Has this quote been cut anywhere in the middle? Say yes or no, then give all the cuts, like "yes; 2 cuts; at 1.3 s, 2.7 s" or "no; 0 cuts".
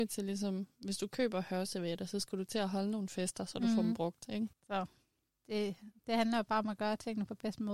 no; 0 cuts